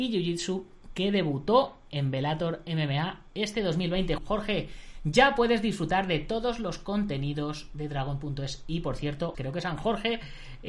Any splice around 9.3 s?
yes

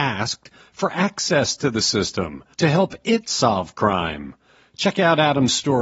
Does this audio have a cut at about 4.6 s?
no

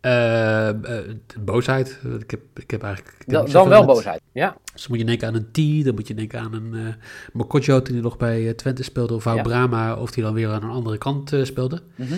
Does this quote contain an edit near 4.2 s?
yes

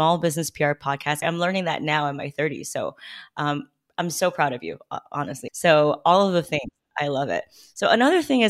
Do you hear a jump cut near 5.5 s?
yes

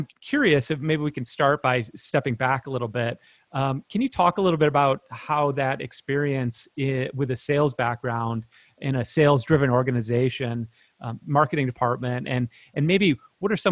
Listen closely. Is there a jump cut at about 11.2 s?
yes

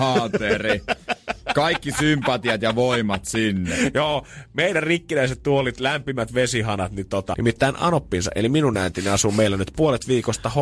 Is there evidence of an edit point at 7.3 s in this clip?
yes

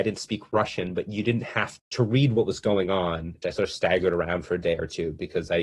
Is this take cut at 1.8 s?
yes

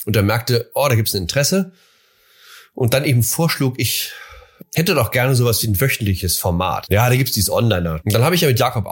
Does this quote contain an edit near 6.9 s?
yes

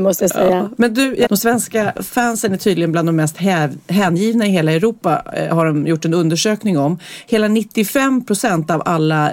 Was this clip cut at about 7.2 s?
no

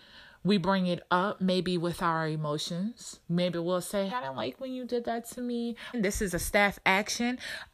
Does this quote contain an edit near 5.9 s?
yes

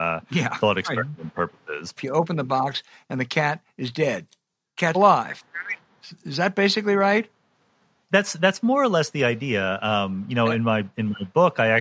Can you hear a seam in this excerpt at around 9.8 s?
no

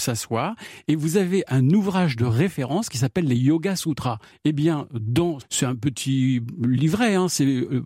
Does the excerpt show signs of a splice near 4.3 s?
yes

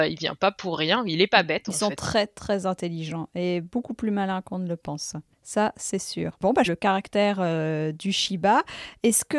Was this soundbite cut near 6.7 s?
yes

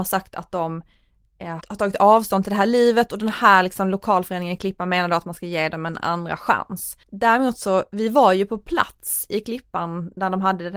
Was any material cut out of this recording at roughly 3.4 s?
no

